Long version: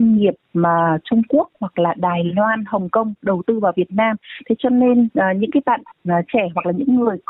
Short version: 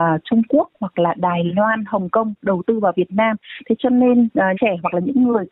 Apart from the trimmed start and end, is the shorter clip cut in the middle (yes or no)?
yes